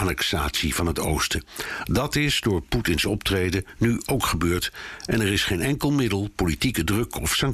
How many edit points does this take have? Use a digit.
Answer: 0